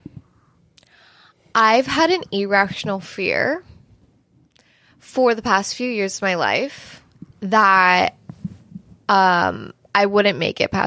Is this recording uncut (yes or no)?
no